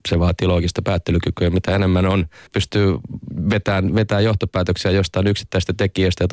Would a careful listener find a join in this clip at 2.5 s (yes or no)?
yes